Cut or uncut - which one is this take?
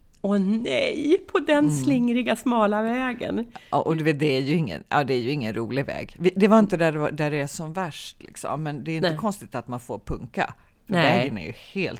uncut